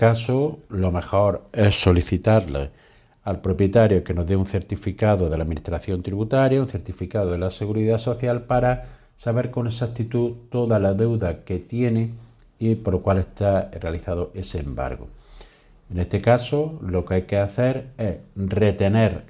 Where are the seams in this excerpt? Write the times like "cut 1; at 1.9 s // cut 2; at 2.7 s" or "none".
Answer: none